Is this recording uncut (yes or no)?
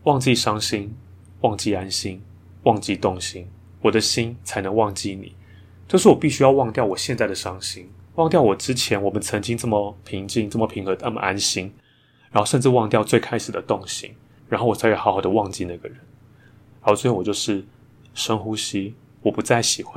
no